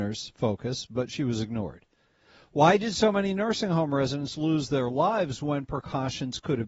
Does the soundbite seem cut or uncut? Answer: uncut